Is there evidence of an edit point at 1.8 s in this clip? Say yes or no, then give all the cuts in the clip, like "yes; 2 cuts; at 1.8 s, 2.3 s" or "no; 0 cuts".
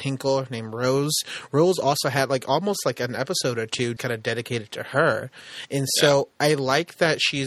no; 1 cut; at 4.0 s